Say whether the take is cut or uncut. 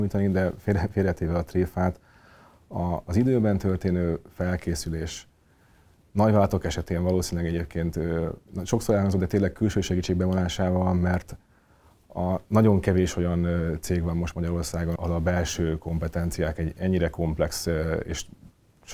cut